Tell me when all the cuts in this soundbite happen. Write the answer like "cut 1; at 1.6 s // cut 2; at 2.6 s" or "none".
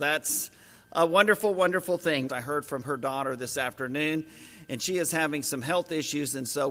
cut 1; at 2.3 s